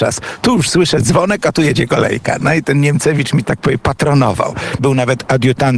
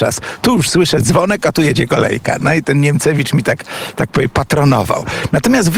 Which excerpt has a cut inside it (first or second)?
first